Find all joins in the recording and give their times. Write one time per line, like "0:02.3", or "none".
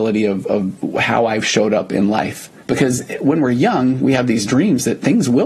0:02.6